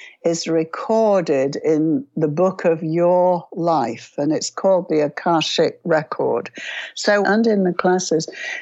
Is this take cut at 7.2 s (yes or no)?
yes